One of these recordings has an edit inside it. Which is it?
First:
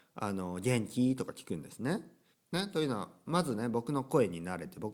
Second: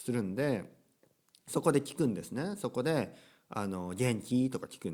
first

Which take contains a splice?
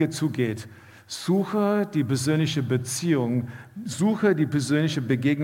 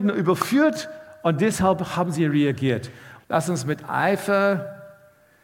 second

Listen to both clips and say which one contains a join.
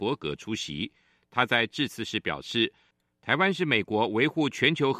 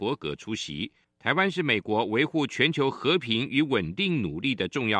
second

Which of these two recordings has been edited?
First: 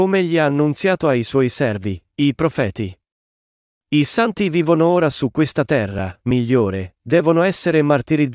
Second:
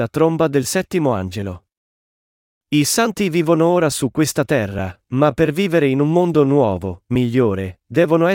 first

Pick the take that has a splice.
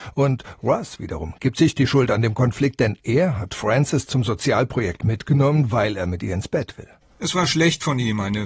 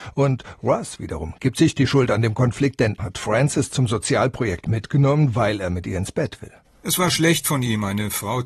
second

